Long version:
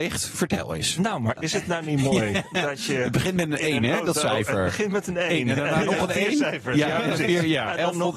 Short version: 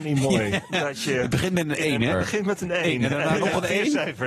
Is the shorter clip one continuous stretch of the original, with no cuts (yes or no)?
no